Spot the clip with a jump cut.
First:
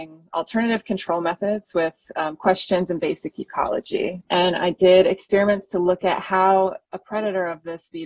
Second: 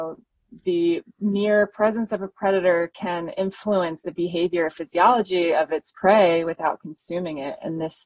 first; 1 cut; at 4.2 s

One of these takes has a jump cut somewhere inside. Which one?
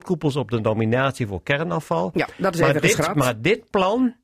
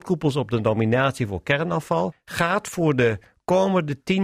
second; 1 cut; at 2.1 s

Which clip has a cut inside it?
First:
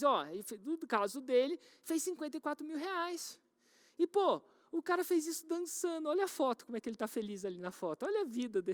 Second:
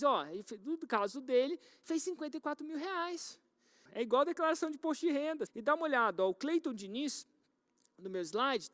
second; 2 cuts; at 3.8 s, 5.5 s

